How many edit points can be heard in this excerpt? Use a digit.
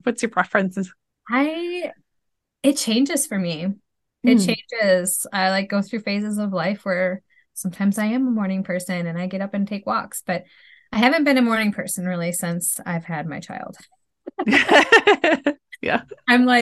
0